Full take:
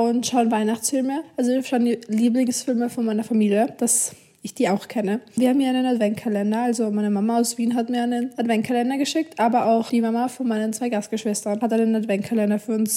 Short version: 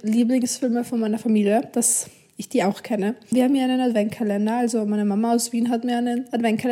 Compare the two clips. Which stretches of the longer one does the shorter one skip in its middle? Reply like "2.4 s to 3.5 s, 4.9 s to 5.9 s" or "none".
none